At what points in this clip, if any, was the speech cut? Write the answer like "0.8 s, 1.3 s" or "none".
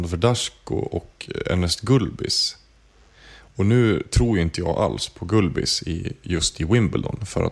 none